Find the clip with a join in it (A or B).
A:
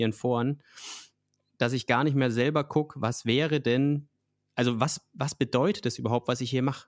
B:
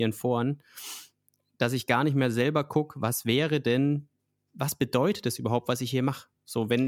B